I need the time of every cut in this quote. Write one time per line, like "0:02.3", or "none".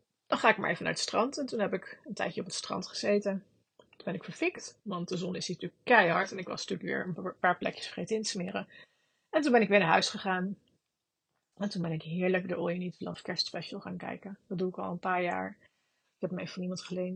0:16.0